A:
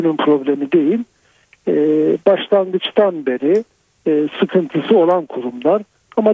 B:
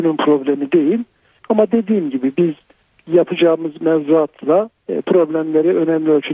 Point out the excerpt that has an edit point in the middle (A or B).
B